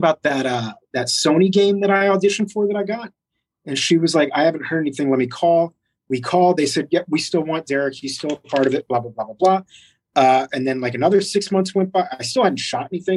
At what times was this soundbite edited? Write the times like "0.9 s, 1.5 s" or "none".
none